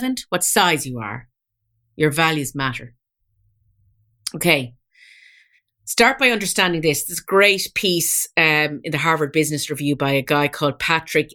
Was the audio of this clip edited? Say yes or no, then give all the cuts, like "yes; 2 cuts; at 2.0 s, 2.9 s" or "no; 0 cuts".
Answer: no; 0 cuts